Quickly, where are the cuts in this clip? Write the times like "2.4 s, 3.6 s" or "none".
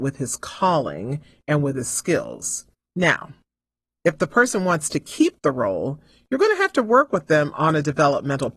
2.9 s